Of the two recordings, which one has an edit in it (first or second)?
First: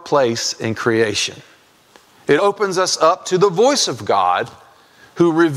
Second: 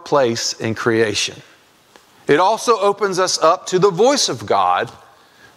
first